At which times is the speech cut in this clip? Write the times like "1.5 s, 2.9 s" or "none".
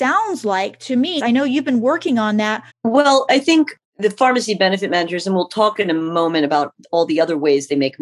1.2 s, 2.7 s